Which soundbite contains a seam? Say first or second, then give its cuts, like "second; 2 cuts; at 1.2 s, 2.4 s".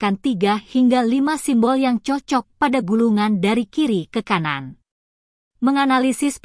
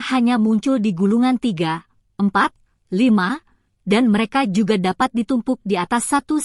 first; 1 cut; at 5.4 s